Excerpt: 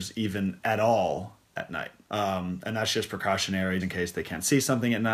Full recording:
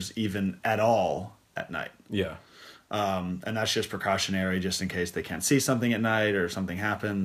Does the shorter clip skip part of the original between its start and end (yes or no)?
yes